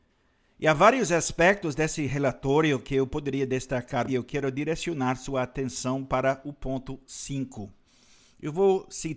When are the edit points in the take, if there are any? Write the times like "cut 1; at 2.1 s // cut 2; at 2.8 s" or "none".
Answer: cut 1; at 4.1 s